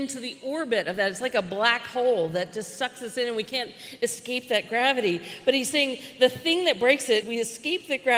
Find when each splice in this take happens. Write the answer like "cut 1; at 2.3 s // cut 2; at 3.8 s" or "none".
cut 1; at 7.2 s